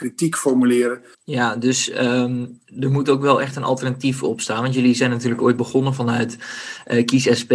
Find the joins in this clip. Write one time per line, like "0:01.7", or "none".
0:01.1